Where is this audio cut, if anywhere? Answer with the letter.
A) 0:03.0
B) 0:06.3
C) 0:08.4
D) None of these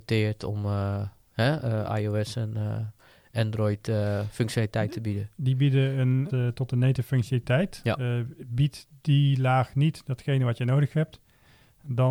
B